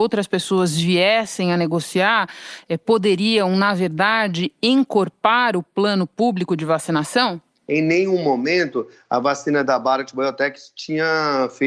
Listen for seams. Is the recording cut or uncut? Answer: cut